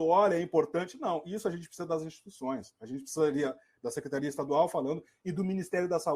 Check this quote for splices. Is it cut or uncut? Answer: cut